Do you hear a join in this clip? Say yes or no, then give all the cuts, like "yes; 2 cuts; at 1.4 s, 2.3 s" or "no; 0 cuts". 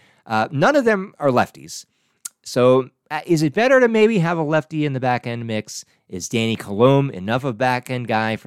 no; 0 cuts